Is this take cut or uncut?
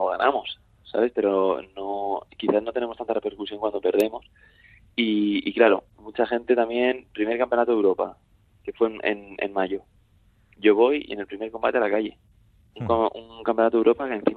uncut